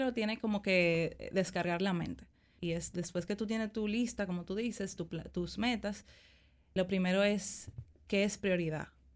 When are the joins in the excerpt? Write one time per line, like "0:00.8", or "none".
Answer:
0:02.6
0:06.8